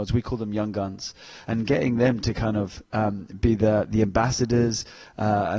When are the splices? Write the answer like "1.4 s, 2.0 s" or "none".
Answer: 1.4 s